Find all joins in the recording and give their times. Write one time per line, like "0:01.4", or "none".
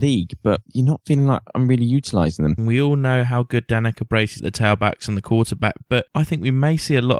0:02.6
0:04.4

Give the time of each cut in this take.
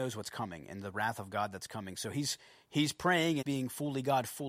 0:03.4

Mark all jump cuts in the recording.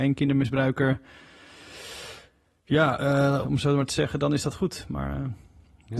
0:03.4

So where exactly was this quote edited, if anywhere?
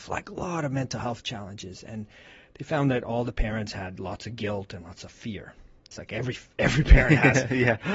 0:05.9

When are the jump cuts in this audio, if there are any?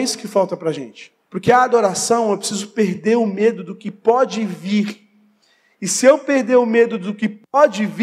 0:01.2

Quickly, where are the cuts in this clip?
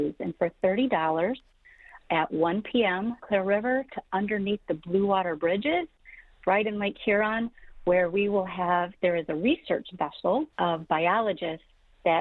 0:03.2
0:10.5

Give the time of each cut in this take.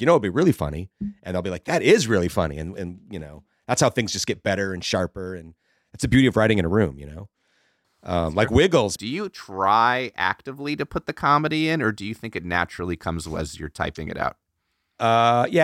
0:09.0

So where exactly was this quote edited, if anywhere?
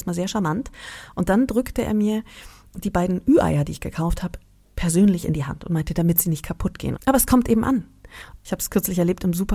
0:06.9

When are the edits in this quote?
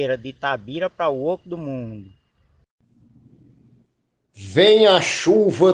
none

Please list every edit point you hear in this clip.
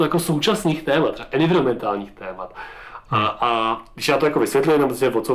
none

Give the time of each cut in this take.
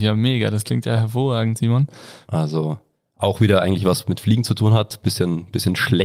0:02.2

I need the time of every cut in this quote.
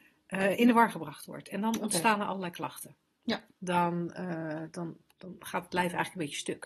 0:05.1

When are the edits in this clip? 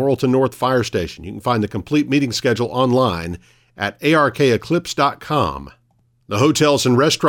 0:06.2

